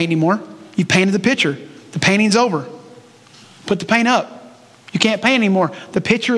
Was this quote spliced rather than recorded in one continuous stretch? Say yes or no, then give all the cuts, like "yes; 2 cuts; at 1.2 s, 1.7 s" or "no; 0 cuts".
no; 0 cuts